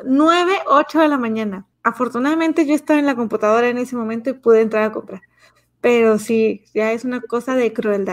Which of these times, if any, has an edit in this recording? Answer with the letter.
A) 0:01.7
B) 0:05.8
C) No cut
A